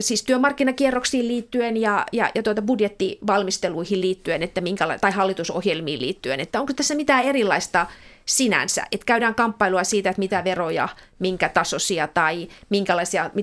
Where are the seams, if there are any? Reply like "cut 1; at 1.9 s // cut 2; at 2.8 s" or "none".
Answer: none

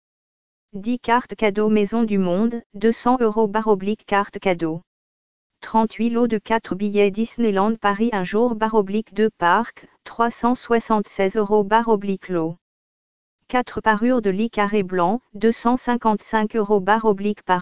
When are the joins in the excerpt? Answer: cut 1; at 5.5 s

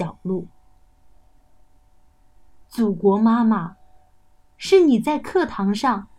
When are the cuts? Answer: none

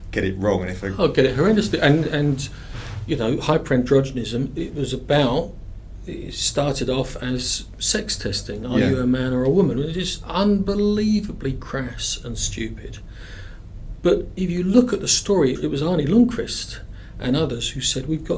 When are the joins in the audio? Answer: cut 1; at 15.5 s

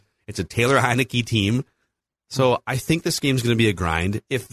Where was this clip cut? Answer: cut 1; at 2.1 s

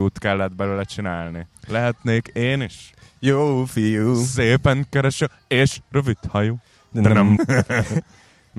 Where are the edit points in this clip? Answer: cut 1; at 1.6 s // cut 2; at 7.4 s

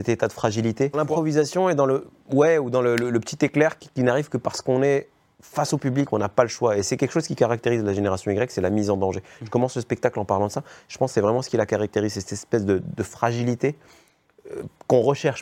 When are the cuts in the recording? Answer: cut 1; at 0.9 s

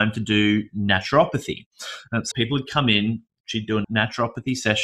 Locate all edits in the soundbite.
cut 1; at 2.3 s

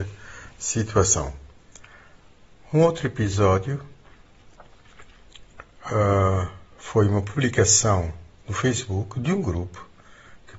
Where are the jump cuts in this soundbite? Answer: none

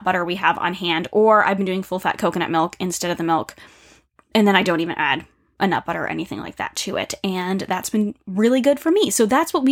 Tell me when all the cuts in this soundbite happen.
none

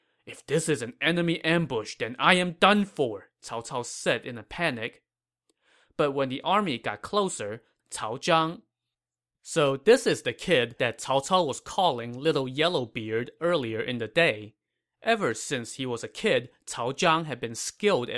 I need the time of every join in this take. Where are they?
cut 1; at 7.8 s

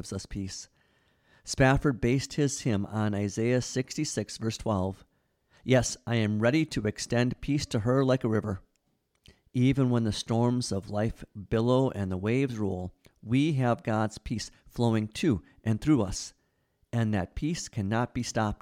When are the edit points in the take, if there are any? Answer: none

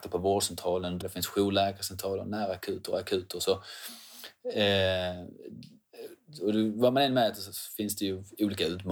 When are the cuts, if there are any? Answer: cut 1; at 1.0 s

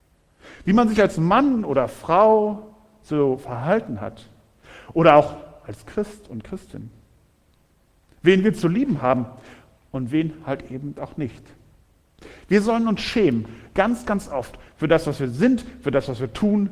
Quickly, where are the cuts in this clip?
none

